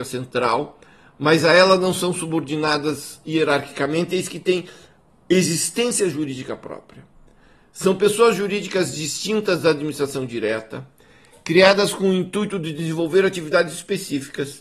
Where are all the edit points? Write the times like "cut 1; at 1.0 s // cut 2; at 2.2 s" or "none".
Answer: none